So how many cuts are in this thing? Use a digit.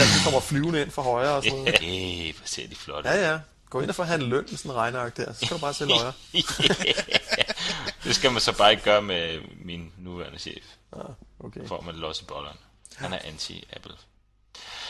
1